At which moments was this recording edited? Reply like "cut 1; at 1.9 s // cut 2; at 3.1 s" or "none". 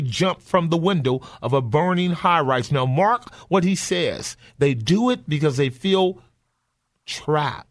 none